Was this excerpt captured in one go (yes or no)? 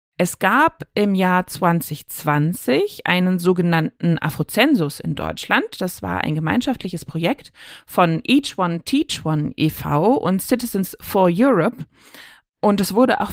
yes